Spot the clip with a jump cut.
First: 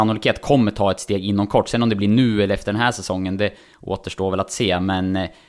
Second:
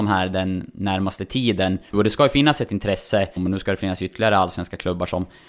second; 2 cuts; at 1.9 s, 3.4 s

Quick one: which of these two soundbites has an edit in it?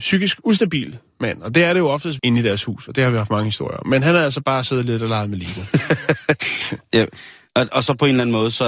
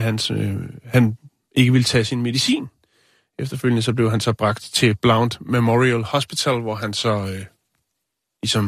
first; 1 cut; at 2.2 s

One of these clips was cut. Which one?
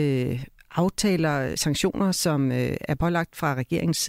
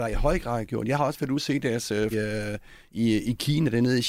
second; 1 cut; at 2.1 s

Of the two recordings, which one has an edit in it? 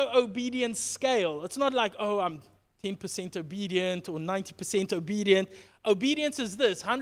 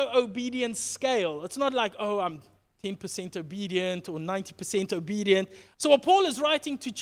second; 1 cut; at 5.7 s

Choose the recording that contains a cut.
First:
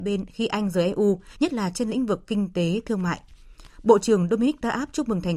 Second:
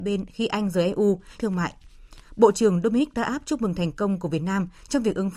second; 1 cut; at 1.4 s

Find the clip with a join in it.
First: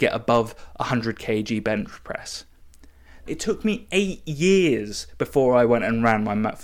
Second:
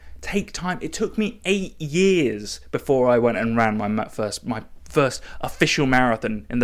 first; 1 cut; at 3.3 s

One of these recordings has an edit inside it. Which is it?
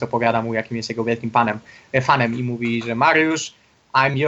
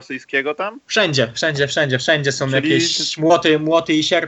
second; 1 cut; at 1.3 s

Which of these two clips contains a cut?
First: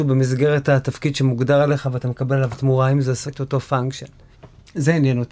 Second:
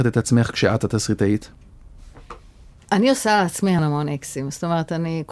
second; 1 cut; at 3.8 s

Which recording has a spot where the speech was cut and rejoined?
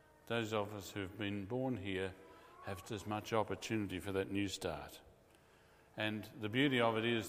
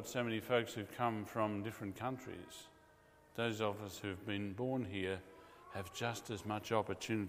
first; 1 cut; at 2.8 s

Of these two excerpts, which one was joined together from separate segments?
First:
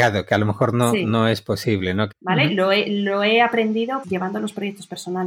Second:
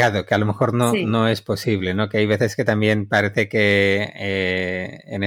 first; 2 cuts; at 2.1 s, 4.0 s

